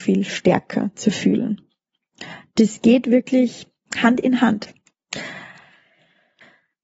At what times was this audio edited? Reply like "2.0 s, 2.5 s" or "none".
none